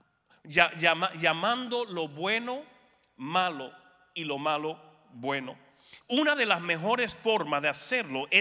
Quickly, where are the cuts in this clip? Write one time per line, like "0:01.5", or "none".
0:06.0